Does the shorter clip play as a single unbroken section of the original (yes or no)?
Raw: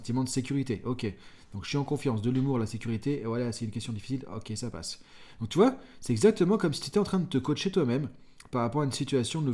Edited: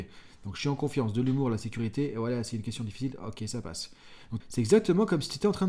no